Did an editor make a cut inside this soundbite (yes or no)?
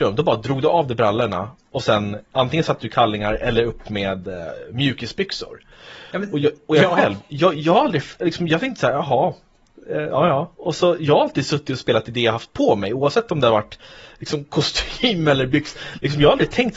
no